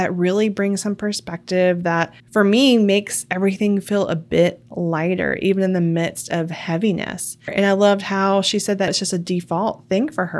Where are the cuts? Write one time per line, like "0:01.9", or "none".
0:07.5
0:08.9